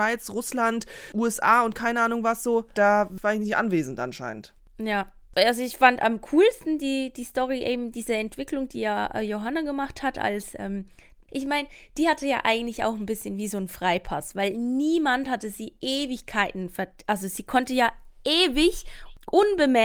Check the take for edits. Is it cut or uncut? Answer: cut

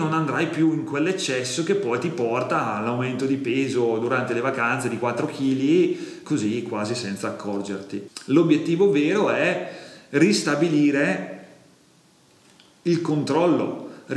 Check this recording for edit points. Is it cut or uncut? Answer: cut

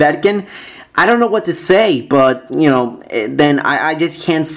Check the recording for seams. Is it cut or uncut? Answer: uncut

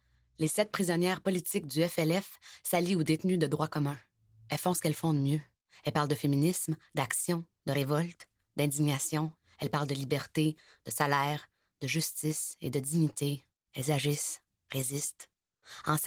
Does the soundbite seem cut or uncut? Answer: uncut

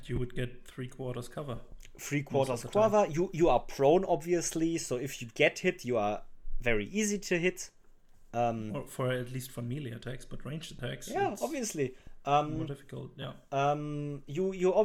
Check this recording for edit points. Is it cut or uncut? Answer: uncut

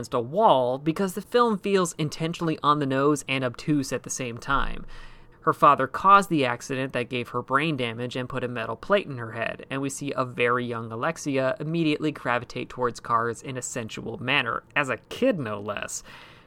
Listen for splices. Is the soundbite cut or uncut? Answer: cut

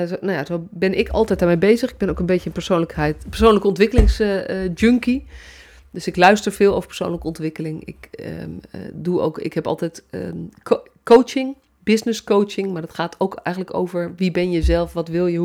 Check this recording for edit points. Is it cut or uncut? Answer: uncut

